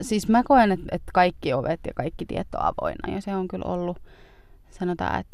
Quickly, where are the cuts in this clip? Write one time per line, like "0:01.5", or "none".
0:03.1